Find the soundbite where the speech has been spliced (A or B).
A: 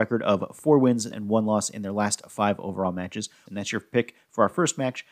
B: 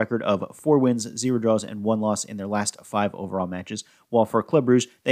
A